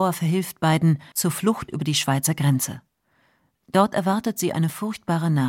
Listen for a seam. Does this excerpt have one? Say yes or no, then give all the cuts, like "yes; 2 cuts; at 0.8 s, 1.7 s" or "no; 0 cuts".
yes; 1 cut; at 1.1 s